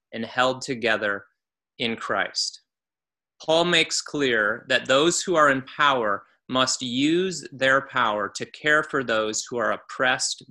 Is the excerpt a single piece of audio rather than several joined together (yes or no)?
yes